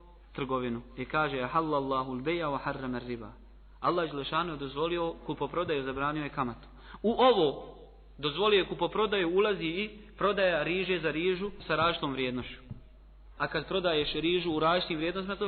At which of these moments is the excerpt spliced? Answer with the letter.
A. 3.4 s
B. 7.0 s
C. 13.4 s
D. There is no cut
C